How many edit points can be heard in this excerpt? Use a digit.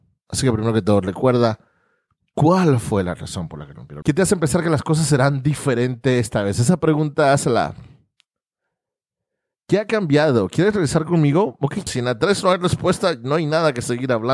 2